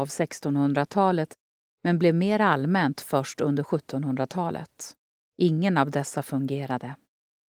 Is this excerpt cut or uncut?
cut